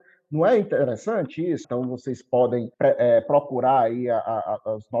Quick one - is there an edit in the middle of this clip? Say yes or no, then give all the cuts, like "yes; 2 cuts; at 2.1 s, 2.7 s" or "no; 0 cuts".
yes; 2 cuts; at 1.6 s, 2.7 s